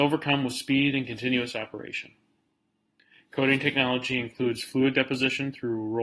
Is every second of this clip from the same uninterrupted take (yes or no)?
yes